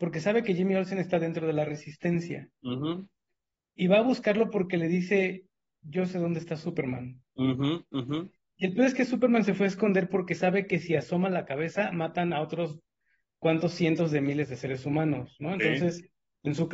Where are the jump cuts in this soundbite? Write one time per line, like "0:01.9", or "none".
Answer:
none

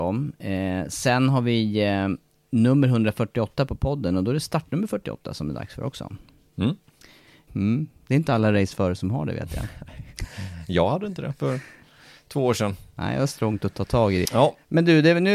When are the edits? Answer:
0:07.5
0:14.3

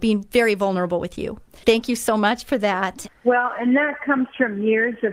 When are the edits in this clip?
0:01.6
0:03.1

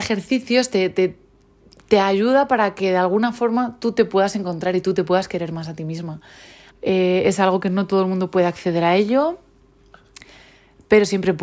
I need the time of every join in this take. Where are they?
0:06.7

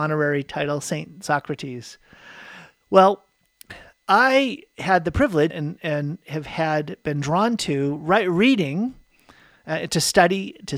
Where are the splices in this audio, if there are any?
0:05.5

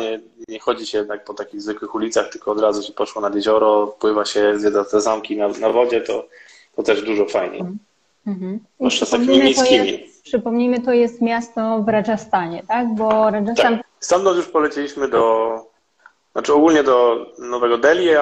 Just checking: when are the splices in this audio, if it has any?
0:07.6
0:10.2
0:13.8

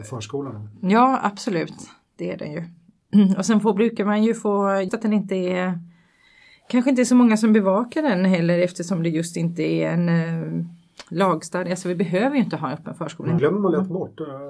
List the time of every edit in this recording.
0:04.9
0:13.4

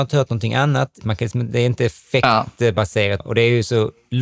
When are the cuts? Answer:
0:01.0
0:03.2

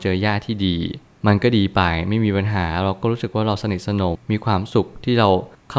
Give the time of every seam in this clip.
0:04.1

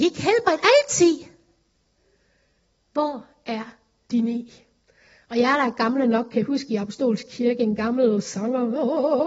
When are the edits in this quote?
none

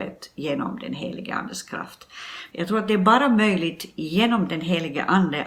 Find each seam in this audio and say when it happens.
0:02.5

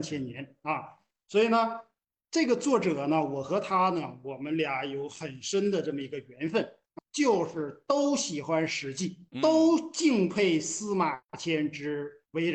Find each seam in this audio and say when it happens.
0:07.0
0:09.3

